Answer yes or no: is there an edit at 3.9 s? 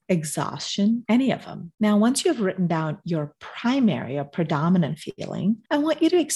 no